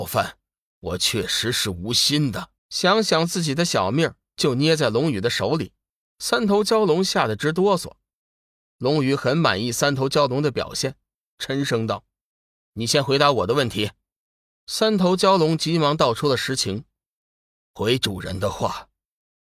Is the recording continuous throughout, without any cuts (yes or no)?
no